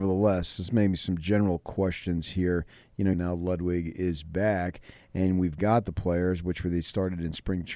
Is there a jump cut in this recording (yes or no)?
yes